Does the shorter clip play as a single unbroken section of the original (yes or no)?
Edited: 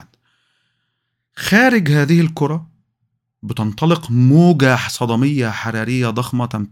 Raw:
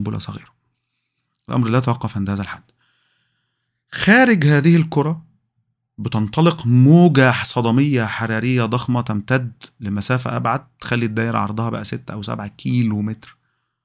yes